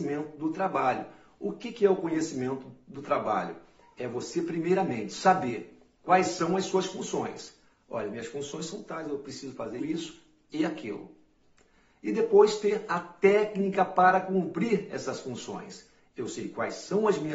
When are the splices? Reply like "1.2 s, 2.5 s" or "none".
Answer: 9.8 s